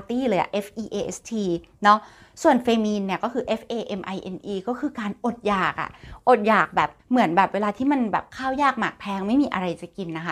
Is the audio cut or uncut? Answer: cut